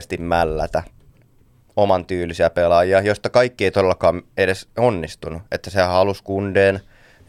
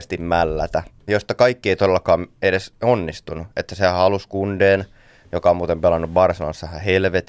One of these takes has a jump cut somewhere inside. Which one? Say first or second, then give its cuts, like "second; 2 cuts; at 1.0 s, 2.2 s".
second; 1 cut; at 1.1 s